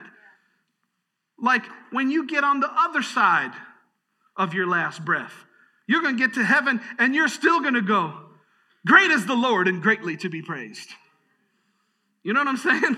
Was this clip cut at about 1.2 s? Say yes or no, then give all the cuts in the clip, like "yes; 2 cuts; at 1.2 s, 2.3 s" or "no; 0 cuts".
no; 0 cuts